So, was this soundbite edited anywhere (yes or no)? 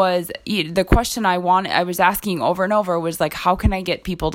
no